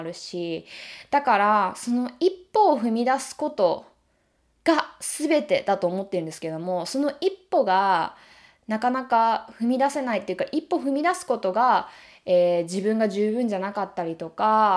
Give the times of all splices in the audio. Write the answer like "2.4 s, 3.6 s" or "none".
none